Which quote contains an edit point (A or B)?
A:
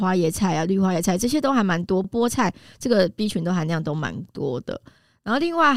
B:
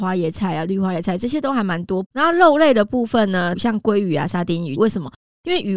B